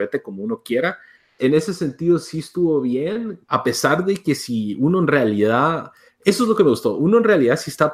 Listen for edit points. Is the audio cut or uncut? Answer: cut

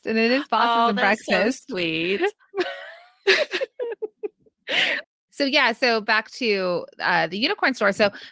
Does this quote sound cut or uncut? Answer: uncut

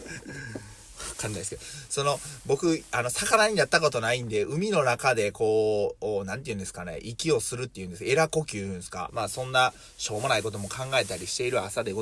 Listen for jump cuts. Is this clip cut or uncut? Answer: cut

